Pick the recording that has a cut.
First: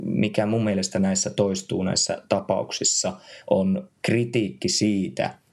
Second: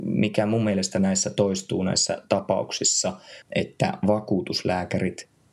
second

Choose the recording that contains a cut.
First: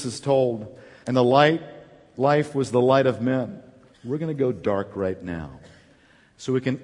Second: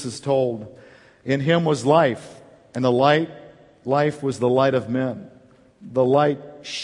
first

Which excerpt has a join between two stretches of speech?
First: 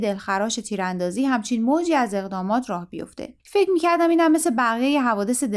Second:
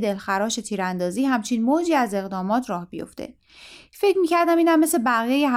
first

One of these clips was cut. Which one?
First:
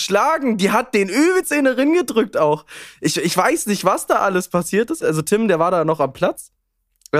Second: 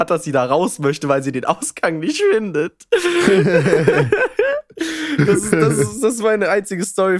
first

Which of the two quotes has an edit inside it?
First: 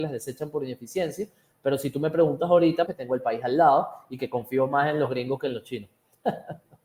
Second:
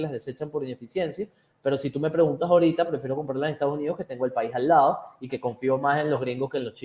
first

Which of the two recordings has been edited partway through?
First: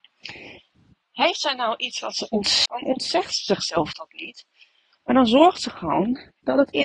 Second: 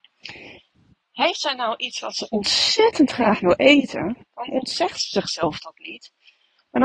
first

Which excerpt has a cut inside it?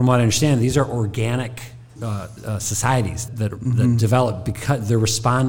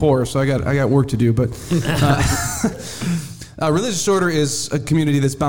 first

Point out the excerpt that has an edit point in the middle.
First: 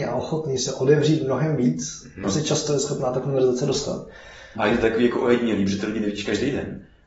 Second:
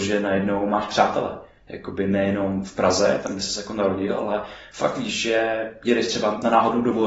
first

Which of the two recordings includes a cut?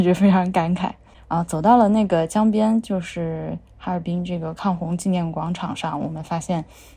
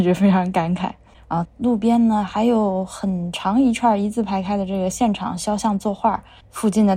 second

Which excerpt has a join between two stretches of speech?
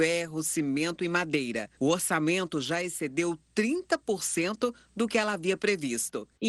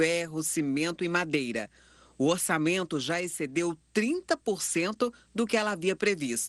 first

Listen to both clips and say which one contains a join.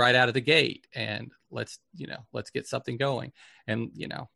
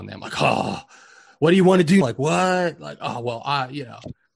second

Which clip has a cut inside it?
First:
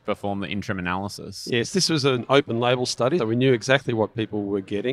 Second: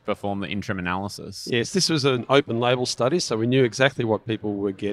first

